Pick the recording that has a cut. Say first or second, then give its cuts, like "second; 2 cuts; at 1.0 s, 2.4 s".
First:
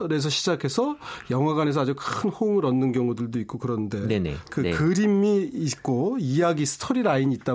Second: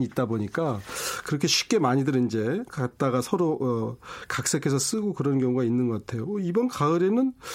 first; 1 cut; at 4.5 s